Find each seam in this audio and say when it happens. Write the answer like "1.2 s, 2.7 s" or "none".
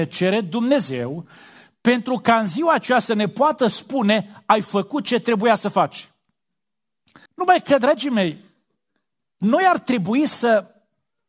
7.3 s